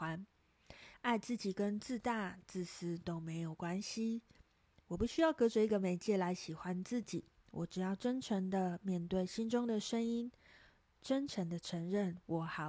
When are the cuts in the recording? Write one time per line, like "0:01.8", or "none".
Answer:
0:00.9